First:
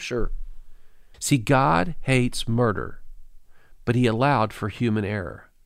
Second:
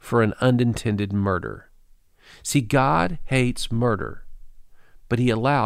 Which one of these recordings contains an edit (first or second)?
first